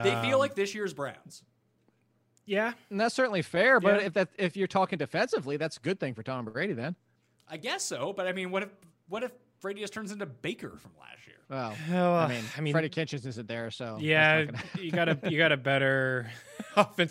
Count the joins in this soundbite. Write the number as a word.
one